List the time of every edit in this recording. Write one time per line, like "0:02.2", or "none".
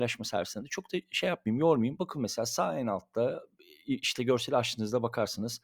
0:02.0

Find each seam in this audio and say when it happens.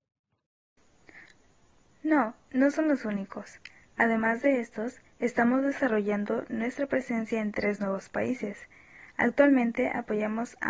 none

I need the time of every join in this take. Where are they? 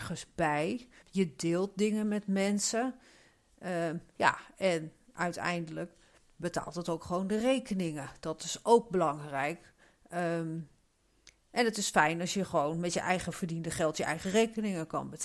0:01.0

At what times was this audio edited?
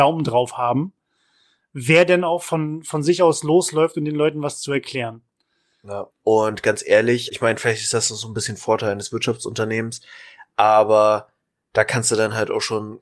0:06.1
0:07.3

